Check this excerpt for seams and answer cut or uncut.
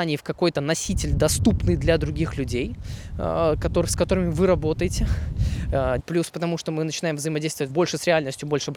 cut